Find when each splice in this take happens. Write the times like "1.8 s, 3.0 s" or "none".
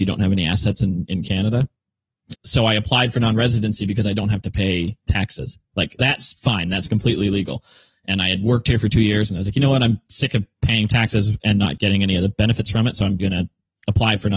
2.3 s, 13.2 s

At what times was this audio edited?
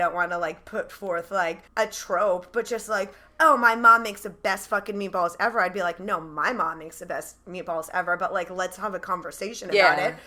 1.7 s

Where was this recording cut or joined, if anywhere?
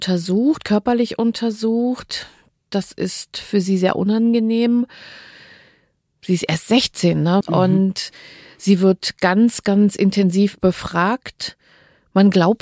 7.4 s

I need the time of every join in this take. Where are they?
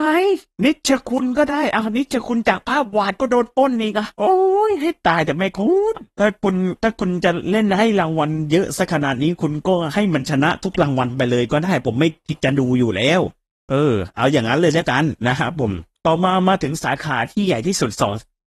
none

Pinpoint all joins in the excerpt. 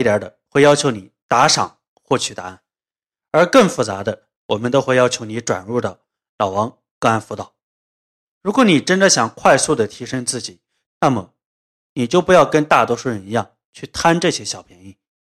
8.2 s, 10.8 s

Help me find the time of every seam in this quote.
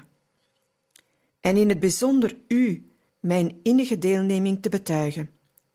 1.3 s, 3.1 s

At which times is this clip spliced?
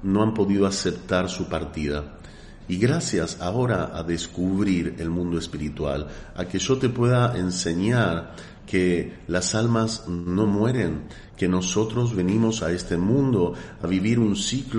2.6 s, 11.3 s

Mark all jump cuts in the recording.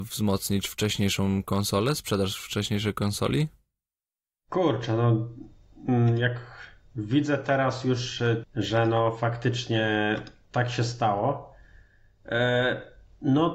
8.4 s

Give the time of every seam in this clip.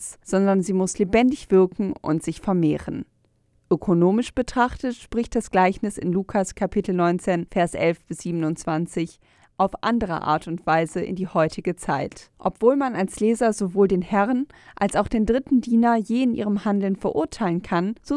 12.3 s

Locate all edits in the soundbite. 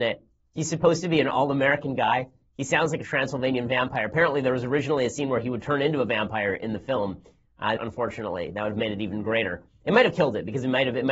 7.8 s

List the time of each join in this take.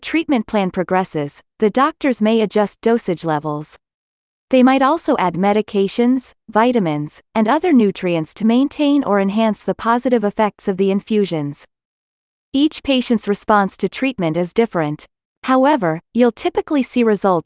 none

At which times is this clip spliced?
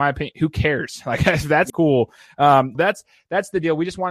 1.7 s, 2.7 s

